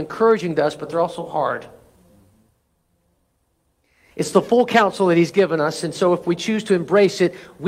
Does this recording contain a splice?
no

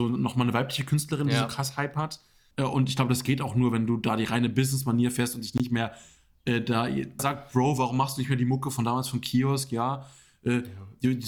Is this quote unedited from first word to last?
no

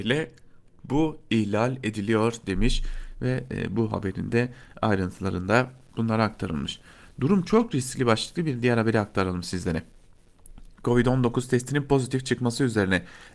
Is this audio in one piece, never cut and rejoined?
yes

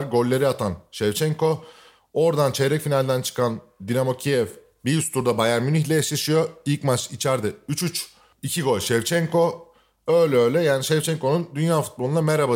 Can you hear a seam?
no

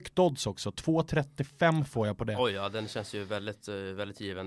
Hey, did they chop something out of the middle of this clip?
no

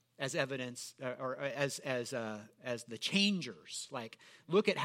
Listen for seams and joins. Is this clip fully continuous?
yes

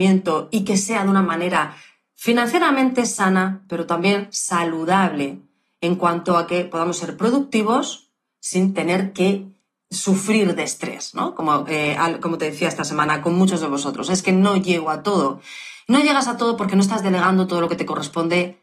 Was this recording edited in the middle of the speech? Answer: yes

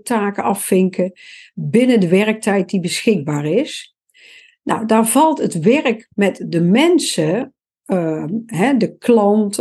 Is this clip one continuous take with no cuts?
yes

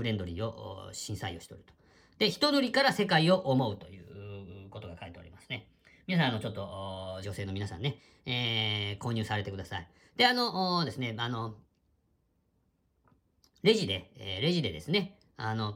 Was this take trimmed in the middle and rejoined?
yes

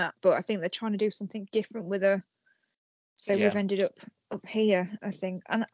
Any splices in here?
no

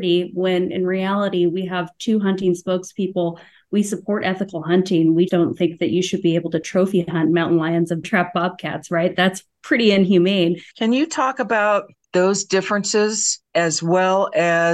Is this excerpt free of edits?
no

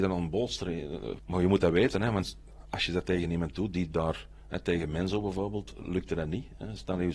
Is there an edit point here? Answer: yes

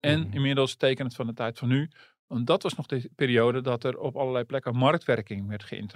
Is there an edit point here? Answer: no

